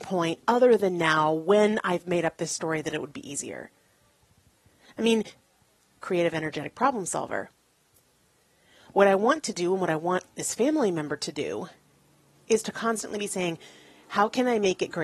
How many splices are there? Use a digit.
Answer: 1